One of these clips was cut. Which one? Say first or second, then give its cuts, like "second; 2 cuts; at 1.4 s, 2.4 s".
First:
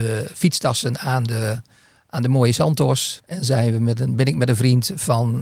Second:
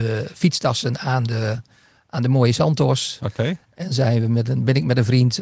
first; 1 cut; at 3.2 s